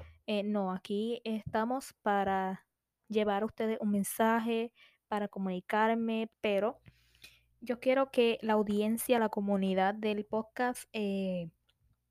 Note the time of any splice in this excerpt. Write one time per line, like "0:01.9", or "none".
0:06.3